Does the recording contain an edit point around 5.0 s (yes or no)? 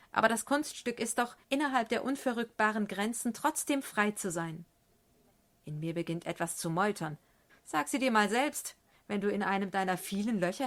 no